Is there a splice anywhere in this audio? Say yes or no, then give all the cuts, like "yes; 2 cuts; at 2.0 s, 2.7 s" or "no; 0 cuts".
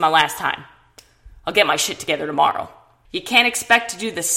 yes; 1 cut; at 3.0 s